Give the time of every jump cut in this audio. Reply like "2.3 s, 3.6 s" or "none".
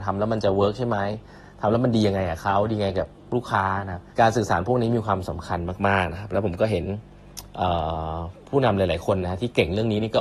4.1 s